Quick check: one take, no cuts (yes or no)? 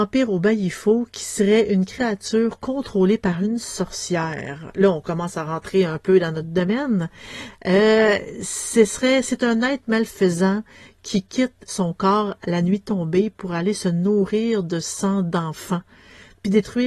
no